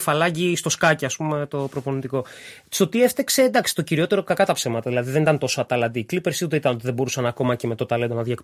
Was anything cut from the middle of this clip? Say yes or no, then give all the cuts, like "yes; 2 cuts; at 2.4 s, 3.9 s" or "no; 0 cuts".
no; 0 cuts